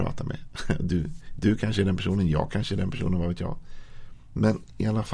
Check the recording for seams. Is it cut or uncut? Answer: uncut